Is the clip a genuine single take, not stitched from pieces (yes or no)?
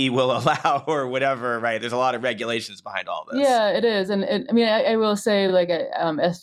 yes